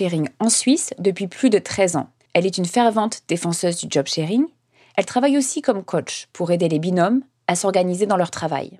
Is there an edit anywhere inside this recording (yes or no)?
yes